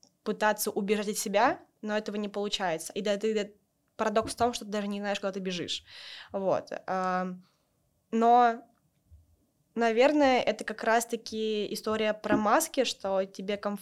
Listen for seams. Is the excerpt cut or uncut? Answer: uncut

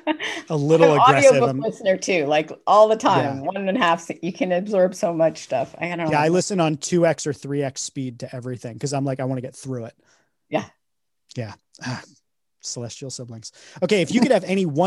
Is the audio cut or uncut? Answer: uncut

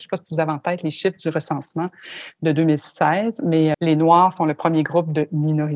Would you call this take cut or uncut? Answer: cut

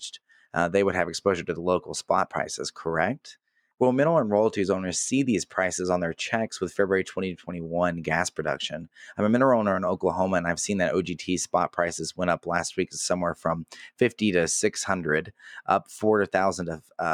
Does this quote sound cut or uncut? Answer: cut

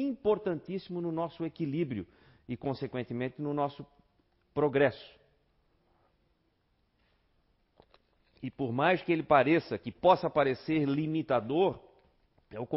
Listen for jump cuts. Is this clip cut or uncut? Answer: uncut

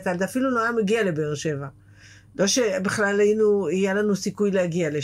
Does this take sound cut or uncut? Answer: uncut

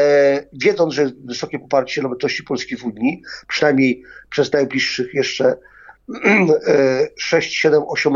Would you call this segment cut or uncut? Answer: uncut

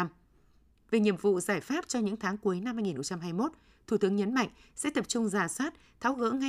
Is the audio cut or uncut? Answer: uncut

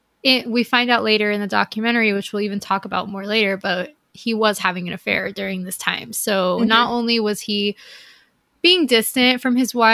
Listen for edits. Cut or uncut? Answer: uncut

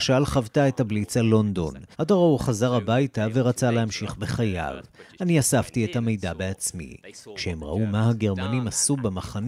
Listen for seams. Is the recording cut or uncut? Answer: cut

